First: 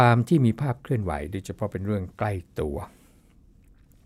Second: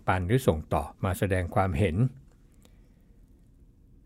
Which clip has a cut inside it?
second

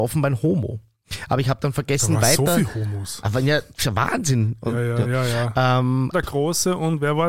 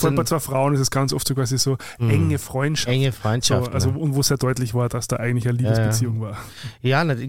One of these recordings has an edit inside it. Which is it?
first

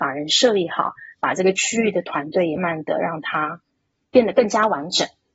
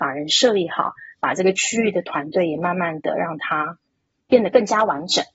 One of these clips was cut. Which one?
first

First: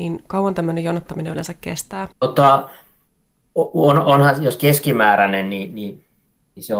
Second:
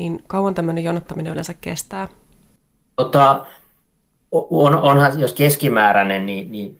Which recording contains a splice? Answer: first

